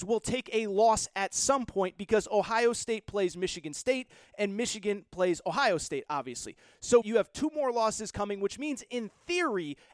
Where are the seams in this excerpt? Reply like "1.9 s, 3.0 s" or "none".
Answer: 7.0 s